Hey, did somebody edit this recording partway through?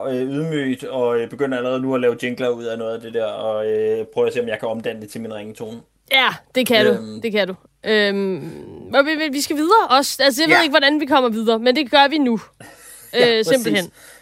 no; 0 cuts

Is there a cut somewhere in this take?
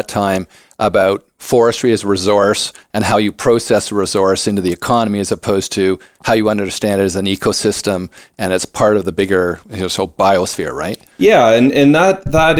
no; 0 cuts

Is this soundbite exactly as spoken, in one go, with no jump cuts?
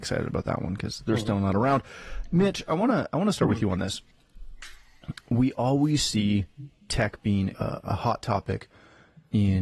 no; 1 cut; at 7.5 s

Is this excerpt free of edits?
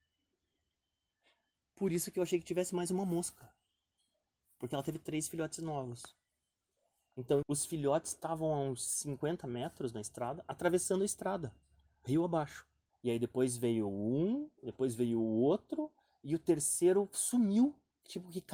no; 2 cuts; at 7.4 s, 12.9 s

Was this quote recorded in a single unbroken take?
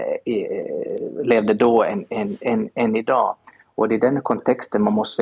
yes; 0 cuts

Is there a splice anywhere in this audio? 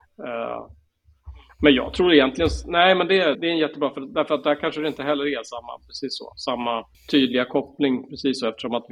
yes; 2 cuts; at 3.3 s, 6.9 s

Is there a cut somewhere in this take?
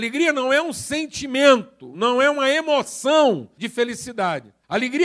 no; 0 cuts

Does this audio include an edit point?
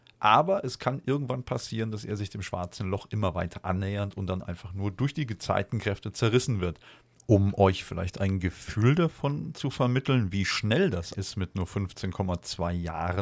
yes; 2 cuts; at 7.1 s, 11.1 s

